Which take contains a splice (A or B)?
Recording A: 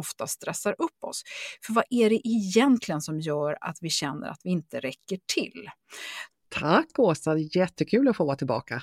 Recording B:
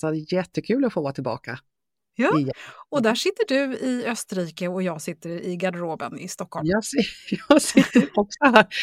A